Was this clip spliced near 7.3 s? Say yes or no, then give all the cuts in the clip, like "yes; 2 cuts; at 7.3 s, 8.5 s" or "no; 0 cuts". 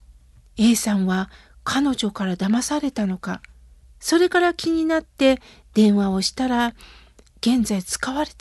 yes; 2 cuts; at 3.8 s, 7.3 s